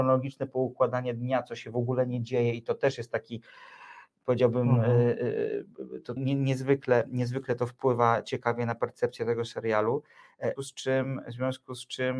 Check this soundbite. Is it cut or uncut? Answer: cut